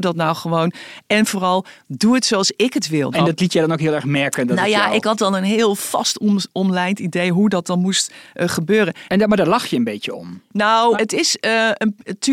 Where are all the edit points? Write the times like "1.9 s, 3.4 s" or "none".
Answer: 3.1 s, 9.1 s, 10.9 s